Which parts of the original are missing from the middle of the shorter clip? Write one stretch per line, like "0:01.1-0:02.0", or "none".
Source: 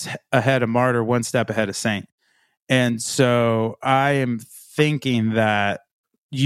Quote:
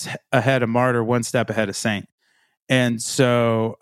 none